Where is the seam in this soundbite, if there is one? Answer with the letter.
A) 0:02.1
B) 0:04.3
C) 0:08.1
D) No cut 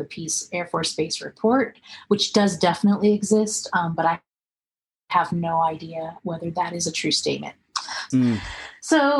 C